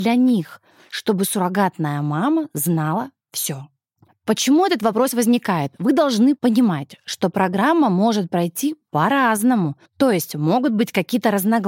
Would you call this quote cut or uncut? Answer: cut